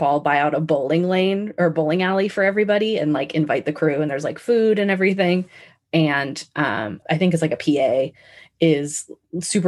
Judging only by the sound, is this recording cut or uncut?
cut